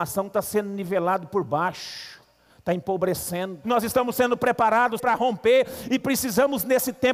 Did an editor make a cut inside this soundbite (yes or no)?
yes